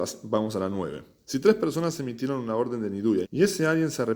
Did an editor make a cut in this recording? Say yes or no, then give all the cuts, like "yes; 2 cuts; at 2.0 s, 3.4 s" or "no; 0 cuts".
yes; 1 cut; at 3.2 s